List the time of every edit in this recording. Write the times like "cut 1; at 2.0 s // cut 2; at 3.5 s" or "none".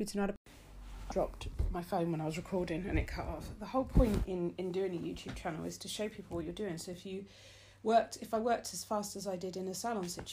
cut 1; at 1.1 s